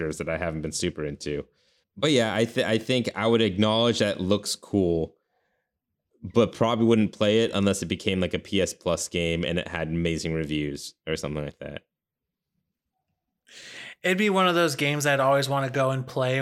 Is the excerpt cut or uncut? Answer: cut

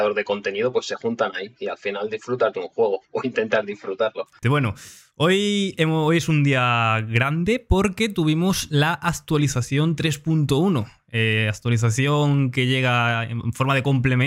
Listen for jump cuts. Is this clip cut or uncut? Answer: cut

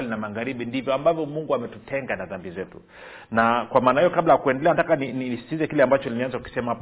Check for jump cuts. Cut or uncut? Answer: uncut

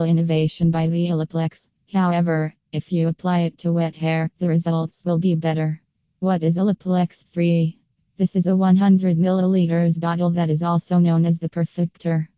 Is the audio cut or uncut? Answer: cut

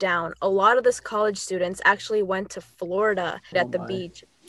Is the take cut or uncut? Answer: cut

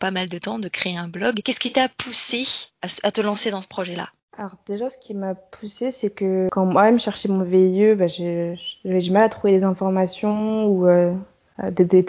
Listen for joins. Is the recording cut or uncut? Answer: uncut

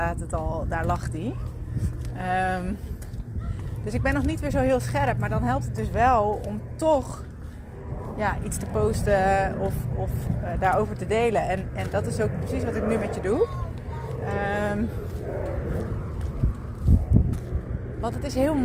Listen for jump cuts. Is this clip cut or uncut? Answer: uncut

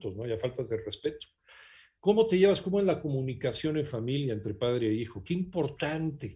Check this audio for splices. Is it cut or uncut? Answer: uncut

